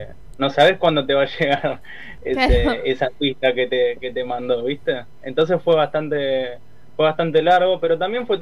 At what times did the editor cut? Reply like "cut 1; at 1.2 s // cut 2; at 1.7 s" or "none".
none